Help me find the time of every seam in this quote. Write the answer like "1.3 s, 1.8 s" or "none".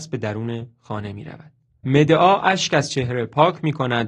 1.8 s